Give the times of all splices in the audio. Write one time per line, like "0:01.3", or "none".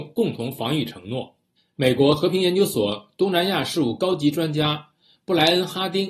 none